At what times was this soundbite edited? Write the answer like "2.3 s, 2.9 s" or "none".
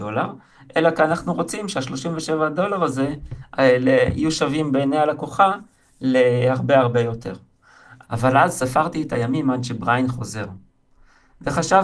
6.8 s, 8.0 s